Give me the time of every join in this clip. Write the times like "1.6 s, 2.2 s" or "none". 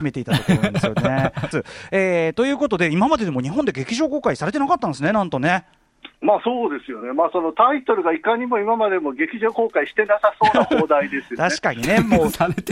1.5 s